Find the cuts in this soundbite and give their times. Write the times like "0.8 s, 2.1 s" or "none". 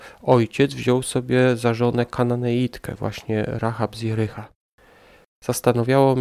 none